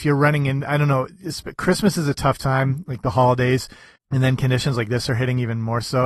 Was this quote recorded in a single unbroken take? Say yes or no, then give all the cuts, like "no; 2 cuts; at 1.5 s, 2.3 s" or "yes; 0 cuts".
no; 1 cut; at 4.0 s